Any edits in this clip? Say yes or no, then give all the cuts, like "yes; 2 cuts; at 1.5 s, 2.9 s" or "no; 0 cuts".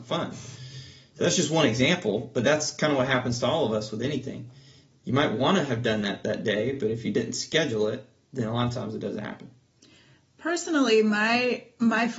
no; 0 cuts